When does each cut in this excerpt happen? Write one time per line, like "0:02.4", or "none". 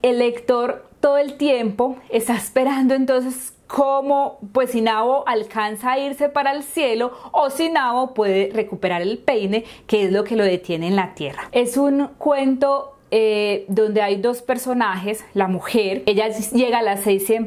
0:11.5